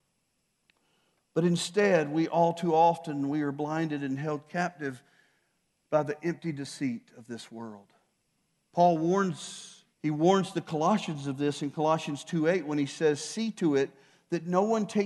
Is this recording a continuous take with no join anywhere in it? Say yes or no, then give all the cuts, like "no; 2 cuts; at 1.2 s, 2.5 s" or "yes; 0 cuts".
no; 1 cut; at 9.9 s